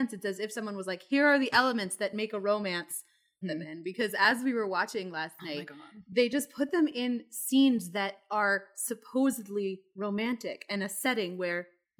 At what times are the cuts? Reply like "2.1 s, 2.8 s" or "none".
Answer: 3.4 s